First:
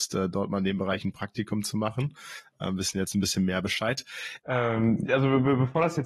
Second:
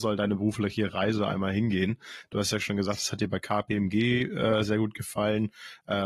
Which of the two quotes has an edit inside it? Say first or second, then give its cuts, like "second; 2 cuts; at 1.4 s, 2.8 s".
first; 1 cut; at 4.4 s